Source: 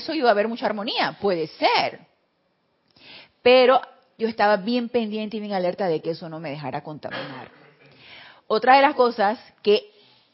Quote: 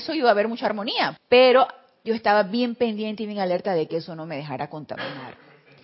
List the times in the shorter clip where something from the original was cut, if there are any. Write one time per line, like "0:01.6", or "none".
0:01.2